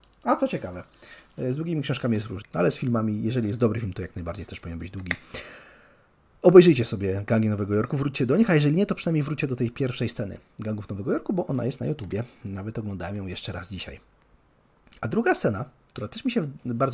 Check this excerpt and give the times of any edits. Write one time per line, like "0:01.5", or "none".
0:02.4